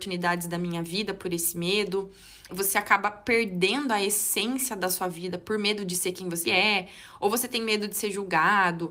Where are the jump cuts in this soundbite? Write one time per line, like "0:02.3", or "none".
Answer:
0:02.5
0:06.4